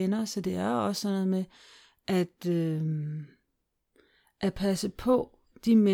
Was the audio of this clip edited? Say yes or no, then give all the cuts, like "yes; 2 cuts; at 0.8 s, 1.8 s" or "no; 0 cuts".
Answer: no; 0 cuts